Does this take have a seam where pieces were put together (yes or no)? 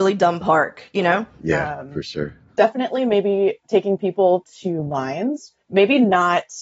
yes